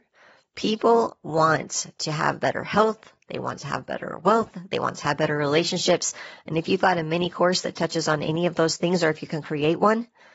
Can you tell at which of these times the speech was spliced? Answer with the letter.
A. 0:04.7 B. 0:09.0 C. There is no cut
C